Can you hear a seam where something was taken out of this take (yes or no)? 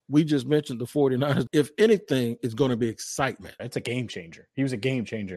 yes